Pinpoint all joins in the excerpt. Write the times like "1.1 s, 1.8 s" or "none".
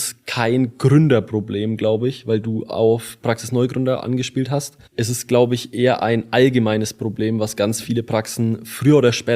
4.9 s